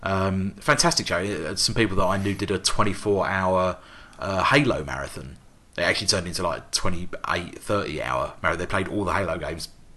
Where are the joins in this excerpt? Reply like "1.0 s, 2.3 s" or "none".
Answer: none